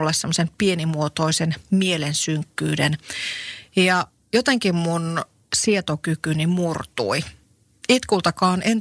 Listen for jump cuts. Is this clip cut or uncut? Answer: uncut